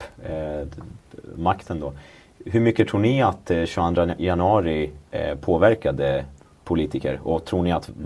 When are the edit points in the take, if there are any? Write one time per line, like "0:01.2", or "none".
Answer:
none